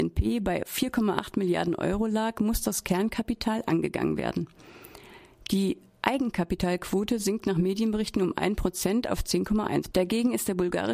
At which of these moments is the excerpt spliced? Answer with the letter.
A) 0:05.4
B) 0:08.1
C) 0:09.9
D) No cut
C